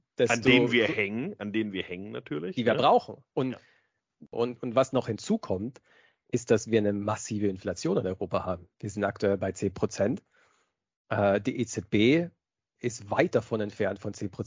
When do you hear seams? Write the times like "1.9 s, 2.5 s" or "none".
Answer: 4.3 s